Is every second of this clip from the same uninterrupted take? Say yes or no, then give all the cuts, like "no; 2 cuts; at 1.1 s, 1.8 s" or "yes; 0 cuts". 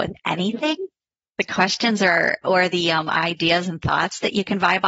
yes; 0 cuts